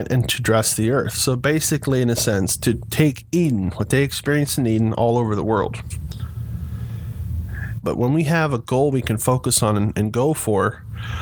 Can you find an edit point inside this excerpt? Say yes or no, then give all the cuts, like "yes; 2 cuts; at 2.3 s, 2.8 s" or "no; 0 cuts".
yes; 2 cuts; at 7.8 s, 9.9 s